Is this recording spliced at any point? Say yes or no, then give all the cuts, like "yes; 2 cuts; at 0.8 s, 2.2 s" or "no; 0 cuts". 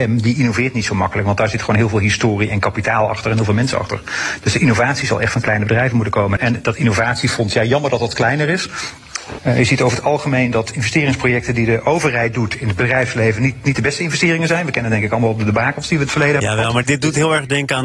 yes; 3 cuts; at 6.4 s, 9.4 s, 16.8 s